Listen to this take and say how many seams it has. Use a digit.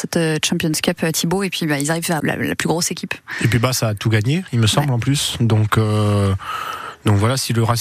1